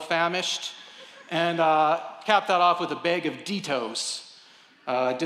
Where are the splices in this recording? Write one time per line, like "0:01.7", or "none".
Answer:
none